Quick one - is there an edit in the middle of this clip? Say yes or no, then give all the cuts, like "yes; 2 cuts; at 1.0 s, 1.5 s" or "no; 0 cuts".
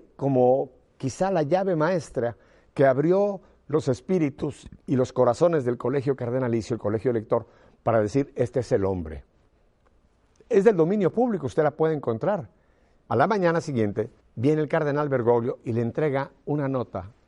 yes; 2 cuts; at 13.1 s, 14.2 s